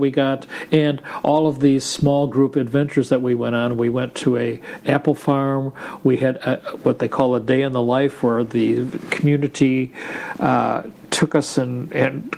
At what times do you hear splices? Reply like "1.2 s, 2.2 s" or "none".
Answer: none

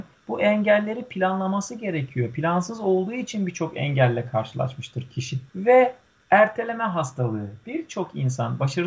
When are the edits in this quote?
5.5 s

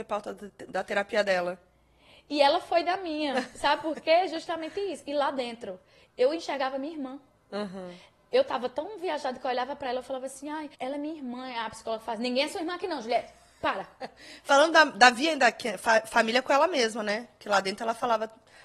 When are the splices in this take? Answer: 10.7 s

